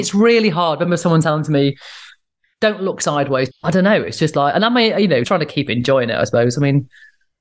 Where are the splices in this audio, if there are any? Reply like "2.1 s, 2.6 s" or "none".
3.5 s, 5.2 s